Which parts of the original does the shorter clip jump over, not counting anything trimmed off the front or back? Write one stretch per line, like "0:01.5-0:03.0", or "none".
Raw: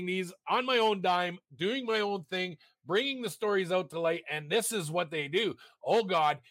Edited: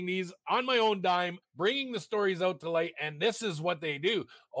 0:01.4-0:02.7